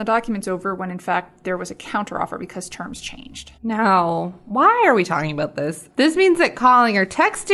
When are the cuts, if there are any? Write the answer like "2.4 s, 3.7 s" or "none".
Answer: 3.6 s, 5.9 s